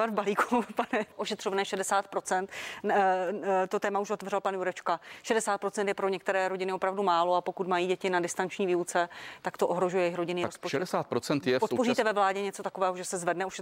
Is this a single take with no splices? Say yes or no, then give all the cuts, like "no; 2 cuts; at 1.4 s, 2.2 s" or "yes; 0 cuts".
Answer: no; 1 cut; at 1.1 s